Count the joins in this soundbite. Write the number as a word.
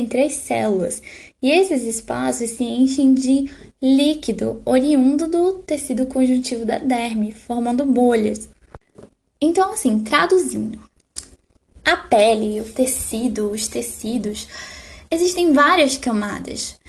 zero